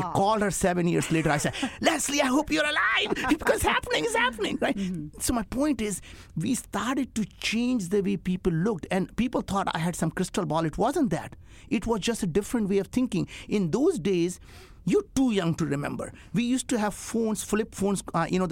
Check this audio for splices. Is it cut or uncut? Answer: uncut